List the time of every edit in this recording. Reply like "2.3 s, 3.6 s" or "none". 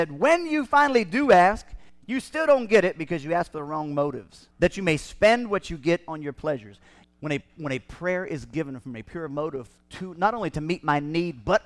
4.5 s, 7.0 s